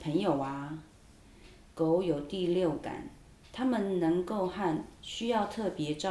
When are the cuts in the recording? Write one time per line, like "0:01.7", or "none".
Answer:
none